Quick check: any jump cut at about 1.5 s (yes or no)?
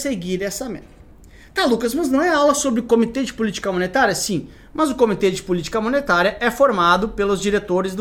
no